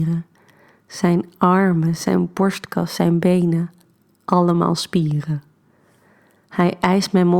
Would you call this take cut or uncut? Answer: uncut